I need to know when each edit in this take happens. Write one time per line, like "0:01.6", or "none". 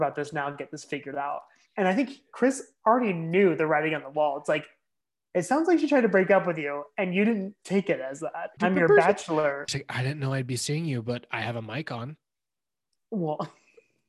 0:08.6
0:09.7